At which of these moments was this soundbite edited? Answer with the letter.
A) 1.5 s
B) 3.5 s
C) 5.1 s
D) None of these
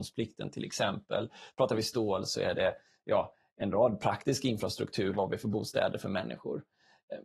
C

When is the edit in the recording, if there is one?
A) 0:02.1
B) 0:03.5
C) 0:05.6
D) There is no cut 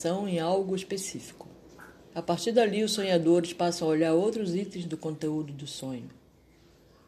A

